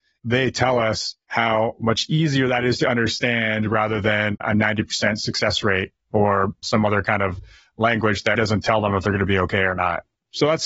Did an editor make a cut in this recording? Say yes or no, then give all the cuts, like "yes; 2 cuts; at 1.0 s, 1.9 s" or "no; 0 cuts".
yes; 1 cut; at 8.3 s